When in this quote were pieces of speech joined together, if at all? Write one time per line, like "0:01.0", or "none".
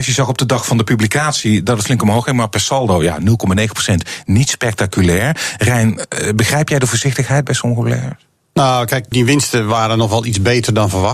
0:09.1